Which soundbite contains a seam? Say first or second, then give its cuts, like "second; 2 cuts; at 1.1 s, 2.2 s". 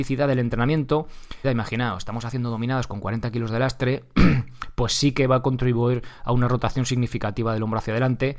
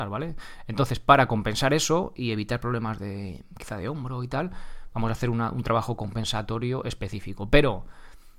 first; 1 cut; at 1.4 s